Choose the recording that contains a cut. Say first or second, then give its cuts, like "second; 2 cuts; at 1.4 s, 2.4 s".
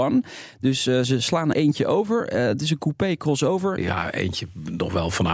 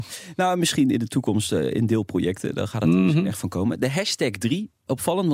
first; 2 cuts; at 1.5 s, 3.8 s